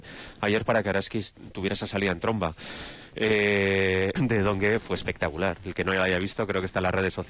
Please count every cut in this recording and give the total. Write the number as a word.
one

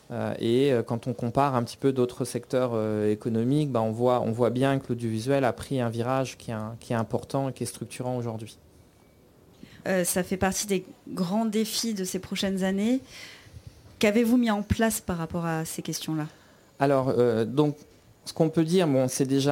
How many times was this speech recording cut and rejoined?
one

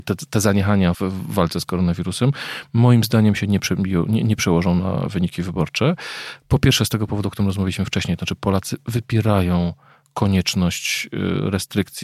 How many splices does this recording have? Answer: one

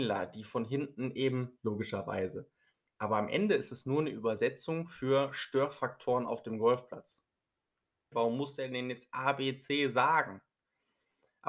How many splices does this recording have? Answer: two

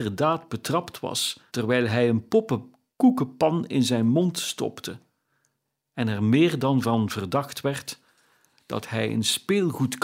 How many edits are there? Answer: one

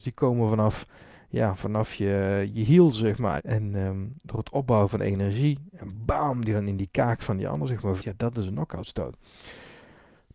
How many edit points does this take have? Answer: two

